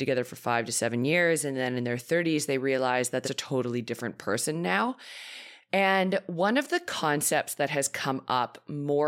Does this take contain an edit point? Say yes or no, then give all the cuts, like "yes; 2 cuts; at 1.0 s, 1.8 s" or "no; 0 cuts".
yes; 1 cut; at 3.2 s